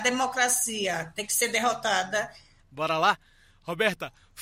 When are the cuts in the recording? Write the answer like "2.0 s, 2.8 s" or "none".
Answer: 2.6 s